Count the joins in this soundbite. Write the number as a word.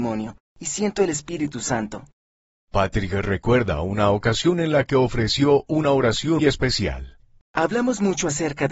one